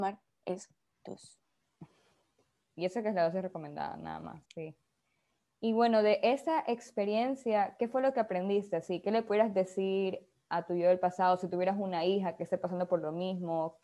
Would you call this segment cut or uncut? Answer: cut